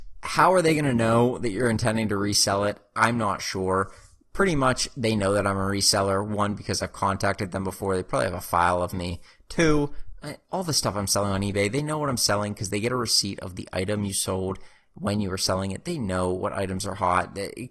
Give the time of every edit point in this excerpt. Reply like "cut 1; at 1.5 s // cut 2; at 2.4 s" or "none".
none